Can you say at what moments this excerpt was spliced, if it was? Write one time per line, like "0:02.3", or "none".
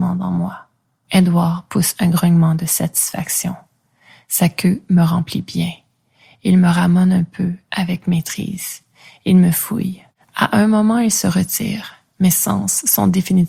none